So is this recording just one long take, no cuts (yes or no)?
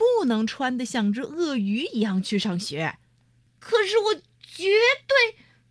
no